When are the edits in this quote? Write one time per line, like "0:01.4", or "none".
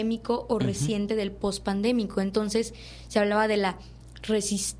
none